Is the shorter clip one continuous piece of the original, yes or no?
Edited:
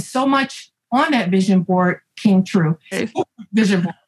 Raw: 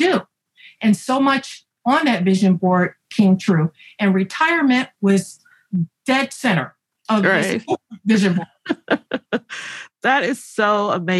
no